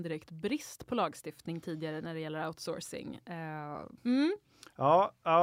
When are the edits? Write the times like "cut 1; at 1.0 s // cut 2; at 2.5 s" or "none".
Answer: cut 1; at 4.0 s